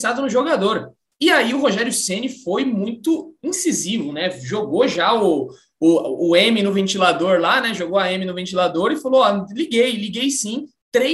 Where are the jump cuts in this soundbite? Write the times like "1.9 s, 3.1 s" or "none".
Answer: none